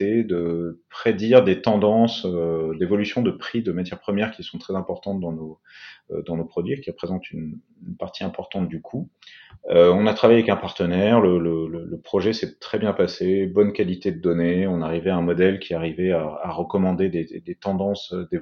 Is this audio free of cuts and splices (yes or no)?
yes